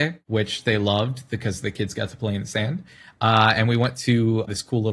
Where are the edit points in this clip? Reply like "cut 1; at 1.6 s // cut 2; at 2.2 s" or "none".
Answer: none